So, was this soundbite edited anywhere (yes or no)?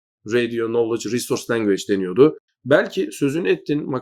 yes